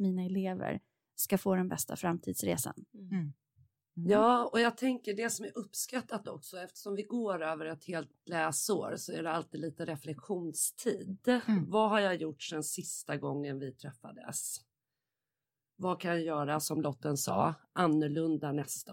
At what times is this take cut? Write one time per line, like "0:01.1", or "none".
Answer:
none